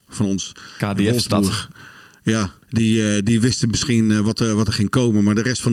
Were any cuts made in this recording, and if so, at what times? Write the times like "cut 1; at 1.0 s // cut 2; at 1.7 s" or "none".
cut 1; at 2.6 s